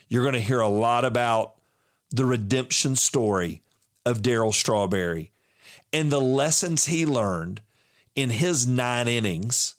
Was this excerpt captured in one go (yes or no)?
yes